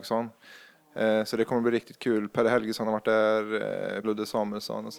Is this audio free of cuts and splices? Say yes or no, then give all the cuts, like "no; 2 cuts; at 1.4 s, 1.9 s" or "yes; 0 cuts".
no; 1 cut; at 4.0 s